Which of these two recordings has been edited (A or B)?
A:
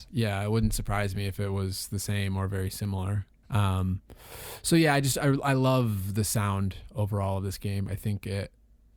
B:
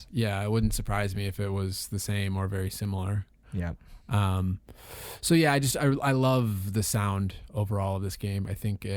A